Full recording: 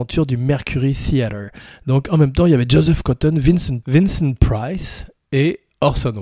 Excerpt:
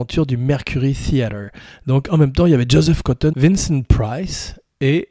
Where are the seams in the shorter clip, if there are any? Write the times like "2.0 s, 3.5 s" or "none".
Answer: 3.3 s